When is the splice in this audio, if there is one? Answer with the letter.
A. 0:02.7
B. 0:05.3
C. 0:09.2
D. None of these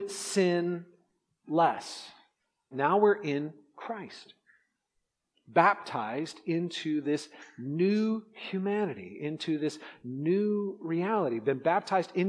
A